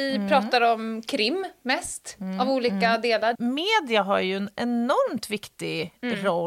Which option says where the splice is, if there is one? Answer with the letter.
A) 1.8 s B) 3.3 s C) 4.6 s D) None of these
B